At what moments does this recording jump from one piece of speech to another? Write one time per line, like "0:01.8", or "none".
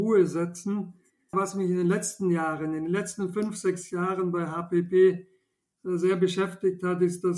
0:01.3